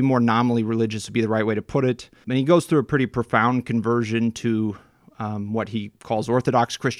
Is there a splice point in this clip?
no; 0 cuts

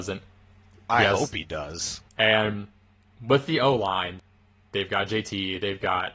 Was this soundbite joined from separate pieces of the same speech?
yes; 1 cut; at 2.1 s

